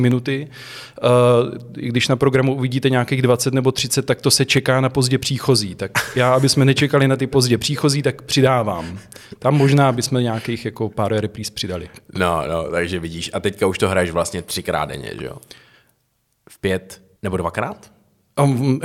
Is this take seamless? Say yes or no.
no